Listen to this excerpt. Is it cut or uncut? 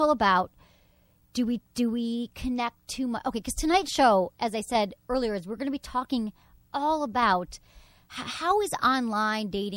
uncut